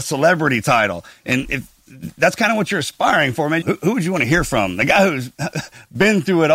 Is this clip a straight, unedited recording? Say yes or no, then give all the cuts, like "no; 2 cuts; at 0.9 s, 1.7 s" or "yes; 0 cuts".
no; 1 cut; at 3.6 s